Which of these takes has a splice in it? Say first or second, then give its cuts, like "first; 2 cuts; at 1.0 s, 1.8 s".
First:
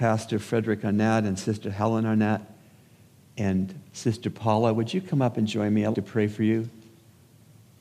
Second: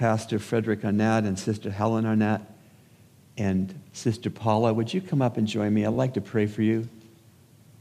first; 1 cut; at 5.9 s